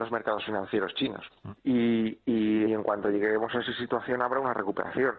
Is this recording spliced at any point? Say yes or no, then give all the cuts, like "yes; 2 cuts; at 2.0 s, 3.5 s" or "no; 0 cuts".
yes; 2 cuts; at 1.6 s, 2.7 s